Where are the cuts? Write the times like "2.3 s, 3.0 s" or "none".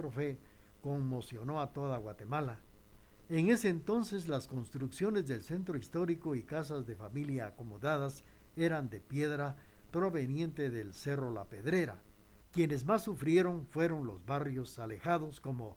3.2 s, 12.4 s

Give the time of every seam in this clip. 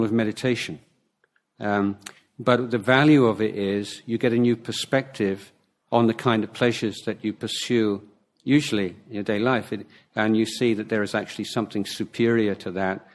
none

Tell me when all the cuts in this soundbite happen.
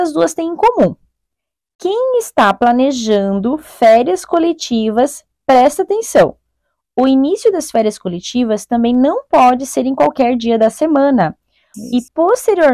11.7 s

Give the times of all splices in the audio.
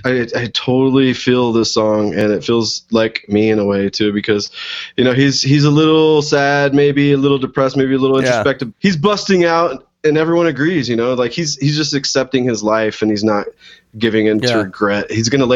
8.7 s

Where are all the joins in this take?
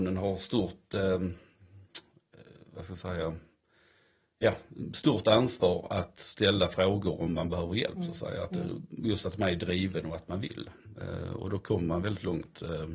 none

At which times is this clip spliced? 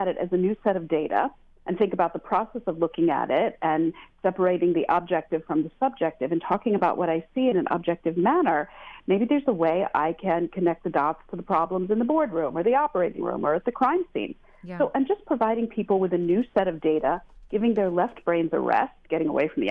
none

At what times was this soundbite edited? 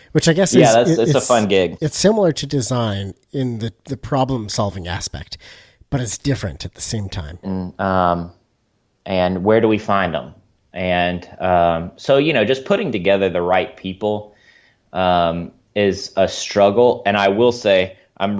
7.4 s

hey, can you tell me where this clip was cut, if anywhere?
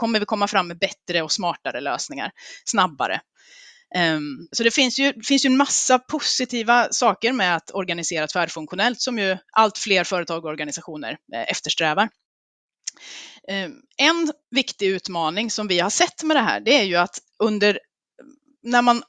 4.5 s

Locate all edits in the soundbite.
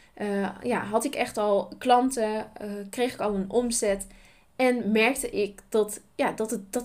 none

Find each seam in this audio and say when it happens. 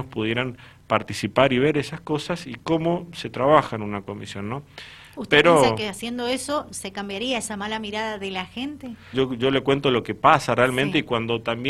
9.1 s

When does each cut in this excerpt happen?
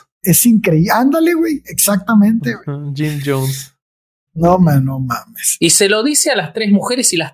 4.3 s

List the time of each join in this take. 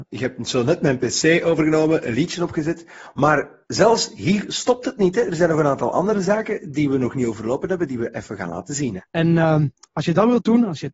9.0 s

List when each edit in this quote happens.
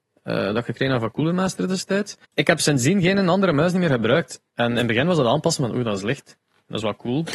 2.2 s

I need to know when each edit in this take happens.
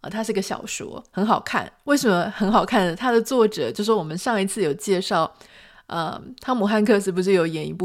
none

